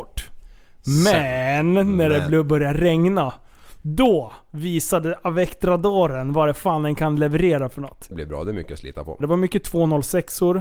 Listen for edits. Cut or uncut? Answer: cut